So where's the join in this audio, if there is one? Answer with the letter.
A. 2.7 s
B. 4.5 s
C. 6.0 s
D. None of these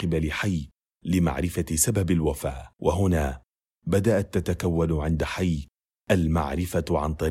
A